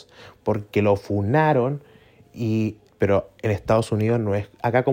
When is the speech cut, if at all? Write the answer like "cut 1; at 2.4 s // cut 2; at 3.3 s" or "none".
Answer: cut 1; at 2.9 s